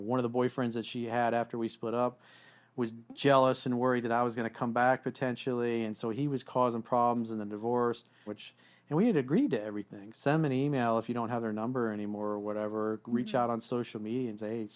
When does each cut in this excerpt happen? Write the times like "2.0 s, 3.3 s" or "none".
8.3 s, 10.1 s